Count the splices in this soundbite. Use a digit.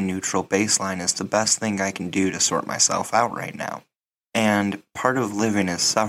1